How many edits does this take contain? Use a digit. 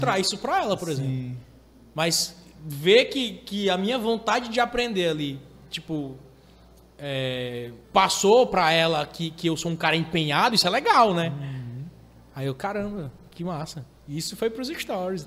1